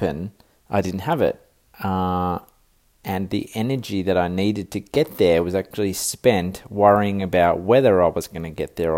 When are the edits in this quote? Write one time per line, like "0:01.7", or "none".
0:01.7